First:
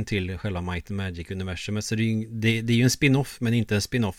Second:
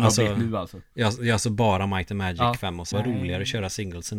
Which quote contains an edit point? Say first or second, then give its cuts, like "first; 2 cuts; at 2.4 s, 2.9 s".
second; 1 cut; at 2.9 s